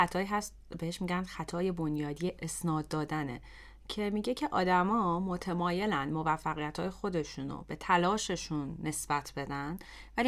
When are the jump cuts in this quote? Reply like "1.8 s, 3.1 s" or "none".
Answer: 2.4 s